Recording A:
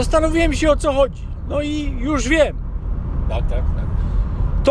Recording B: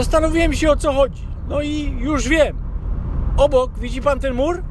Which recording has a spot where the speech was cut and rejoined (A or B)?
A